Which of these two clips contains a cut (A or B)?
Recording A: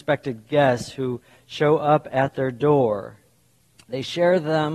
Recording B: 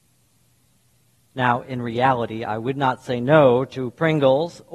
A